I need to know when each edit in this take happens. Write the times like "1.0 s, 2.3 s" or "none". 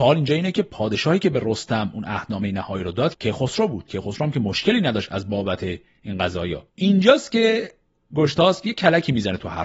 3.1 s, 6.7 s